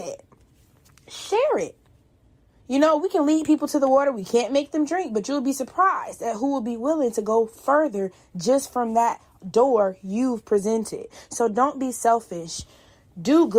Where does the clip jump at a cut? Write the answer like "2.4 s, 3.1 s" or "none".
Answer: none

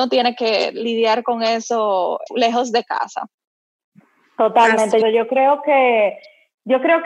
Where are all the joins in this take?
2.3 s, 5.0 s

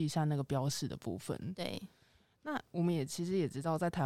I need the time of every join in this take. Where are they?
none

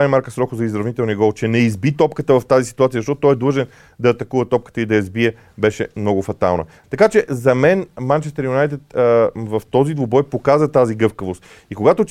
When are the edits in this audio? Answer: 6.8 s

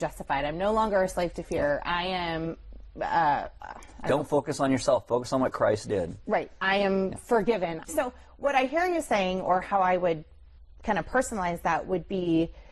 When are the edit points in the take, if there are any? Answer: 7.8 s

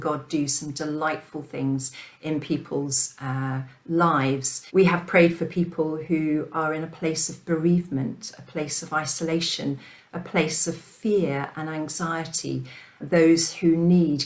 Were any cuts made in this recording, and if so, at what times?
4.7 s, 13.0 s

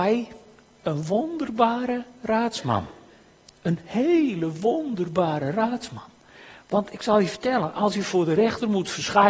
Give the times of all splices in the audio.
none

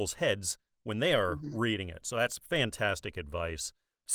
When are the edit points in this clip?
none

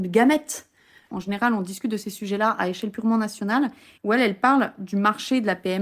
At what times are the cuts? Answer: 1.1 s, 4.0 s

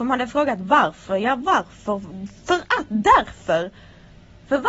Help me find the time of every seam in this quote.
none

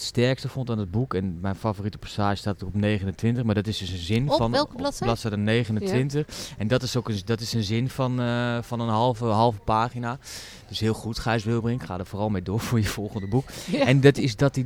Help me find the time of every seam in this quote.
none

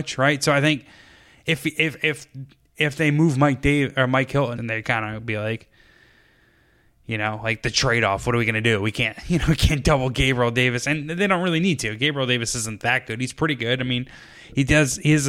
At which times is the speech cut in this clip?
4.6 s

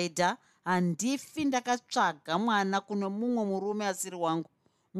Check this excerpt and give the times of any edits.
none

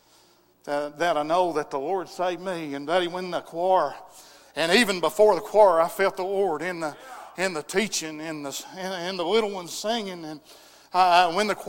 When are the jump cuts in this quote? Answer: none

